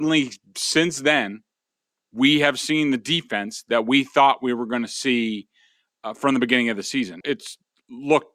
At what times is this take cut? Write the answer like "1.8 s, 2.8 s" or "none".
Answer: 7.2 s